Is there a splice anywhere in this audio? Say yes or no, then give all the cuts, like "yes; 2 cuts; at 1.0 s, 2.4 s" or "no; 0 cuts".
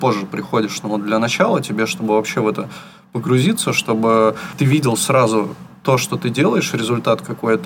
no; 0 cuts